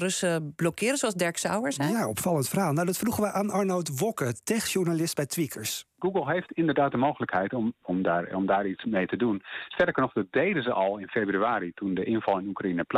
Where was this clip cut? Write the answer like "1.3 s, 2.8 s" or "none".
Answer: 7.8 s